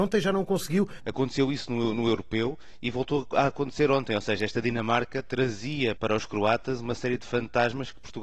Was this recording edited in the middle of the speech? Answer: yes; 2 cuts; at 1.0 s, 6.0 s

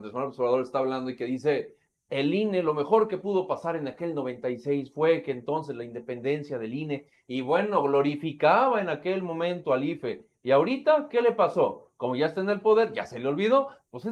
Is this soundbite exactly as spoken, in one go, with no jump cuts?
yes; 0 cuts

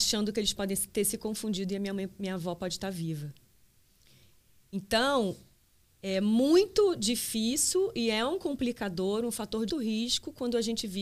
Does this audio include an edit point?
yes; 1 cut; at 9.7 s

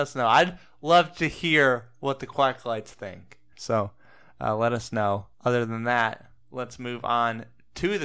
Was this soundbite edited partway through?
yes; 2 cuts; at 3.5 s, 5.3 s

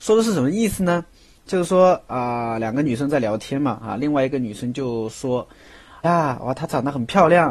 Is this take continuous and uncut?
no; 2 cuts; at 3.8 s, 6.0 s

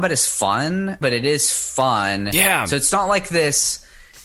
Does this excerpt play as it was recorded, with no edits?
no; 1 cut; at 1.0 s

